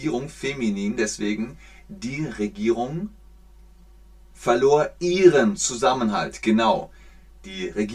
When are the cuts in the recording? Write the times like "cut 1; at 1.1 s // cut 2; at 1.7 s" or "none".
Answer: none

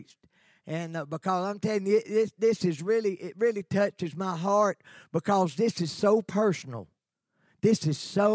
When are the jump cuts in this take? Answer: none

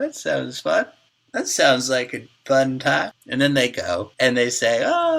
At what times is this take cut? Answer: cut 1; at 3.2 s

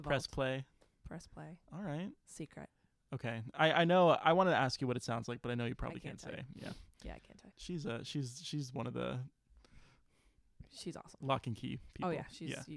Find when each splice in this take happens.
cut 1; at 7.5 s

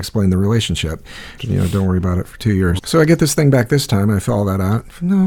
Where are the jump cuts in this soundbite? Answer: cut 1; at 1.4 s // cut 2; at 2.8 s

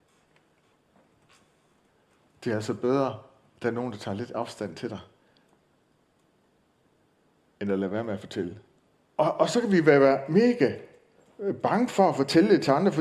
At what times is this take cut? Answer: cut 1; at 9.1 s

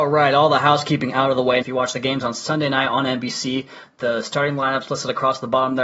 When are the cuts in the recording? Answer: cut 1; at 1.6 s

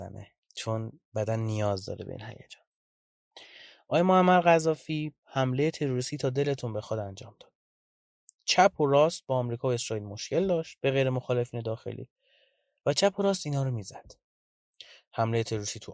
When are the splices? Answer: none

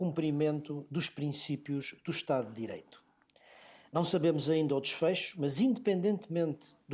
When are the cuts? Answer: none

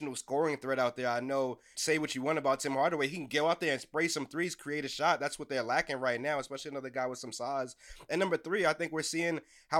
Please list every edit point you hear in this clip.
cut 1; at 1.7 s

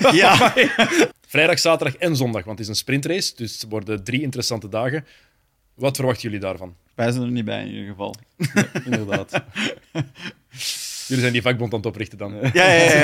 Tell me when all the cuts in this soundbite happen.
cut 1; at 1.1 s

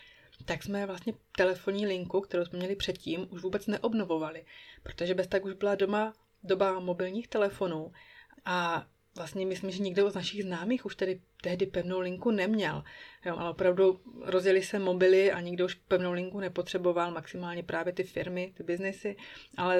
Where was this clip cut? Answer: cut 1; at 13.4 s

